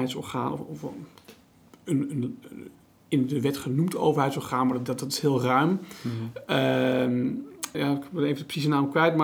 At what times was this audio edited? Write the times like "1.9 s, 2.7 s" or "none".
7.7 s